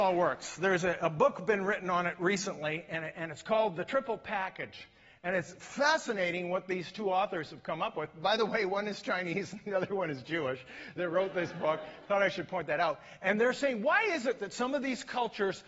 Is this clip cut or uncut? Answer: uncut